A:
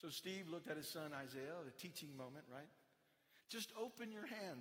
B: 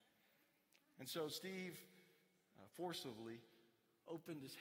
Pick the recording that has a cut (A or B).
A